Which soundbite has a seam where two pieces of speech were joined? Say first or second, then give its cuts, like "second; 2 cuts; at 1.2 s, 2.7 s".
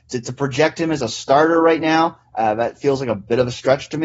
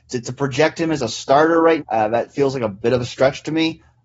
second; 1 cut; at 1.8 s